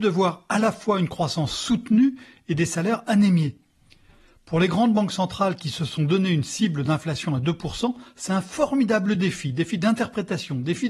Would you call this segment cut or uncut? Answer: uncut